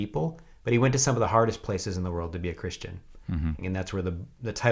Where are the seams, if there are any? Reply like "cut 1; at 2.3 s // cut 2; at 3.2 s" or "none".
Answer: cut 1; at 3.6 s